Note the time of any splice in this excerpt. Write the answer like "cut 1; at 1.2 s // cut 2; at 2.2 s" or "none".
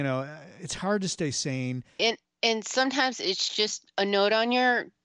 cut 1; at 2.0 s